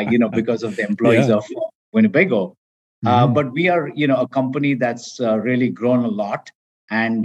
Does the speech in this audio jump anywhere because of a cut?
no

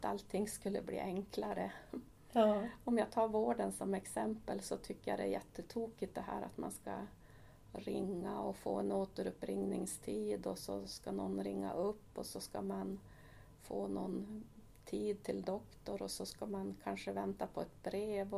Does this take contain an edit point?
no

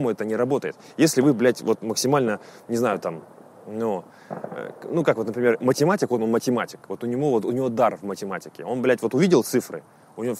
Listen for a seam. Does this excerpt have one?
no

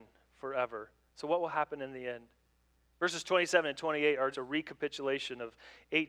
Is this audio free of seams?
no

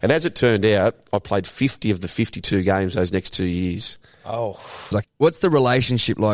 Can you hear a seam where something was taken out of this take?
yes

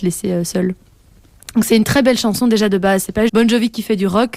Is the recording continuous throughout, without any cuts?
no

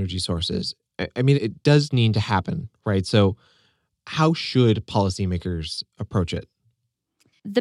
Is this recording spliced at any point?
yes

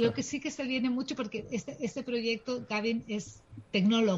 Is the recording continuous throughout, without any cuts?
yes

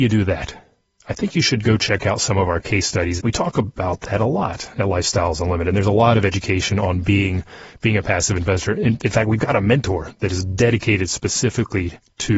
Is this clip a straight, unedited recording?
no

